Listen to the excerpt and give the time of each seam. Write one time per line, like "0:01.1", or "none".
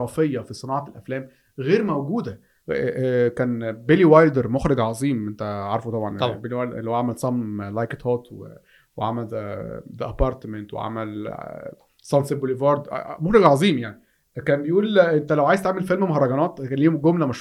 none